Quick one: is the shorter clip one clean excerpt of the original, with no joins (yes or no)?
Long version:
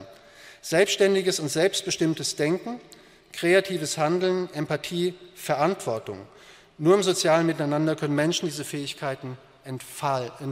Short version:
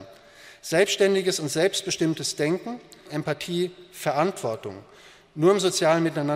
no